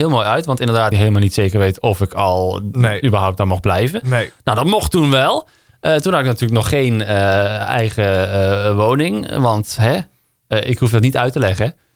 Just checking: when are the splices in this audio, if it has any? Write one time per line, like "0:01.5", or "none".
0:00.9